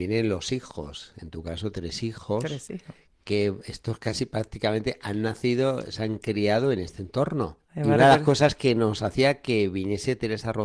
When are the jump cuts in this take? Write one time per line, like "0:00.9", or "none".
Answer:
0:01.7
0:07.6